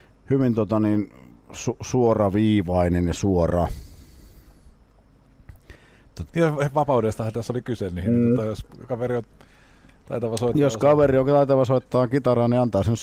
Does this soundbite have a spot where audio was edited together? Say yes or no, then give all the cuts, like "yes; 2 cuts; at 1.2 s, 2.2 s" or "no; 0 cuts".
yes; 1 cut; at 6.3 s